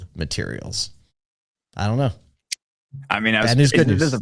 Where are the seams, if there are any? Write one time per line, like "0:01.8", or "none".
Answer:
none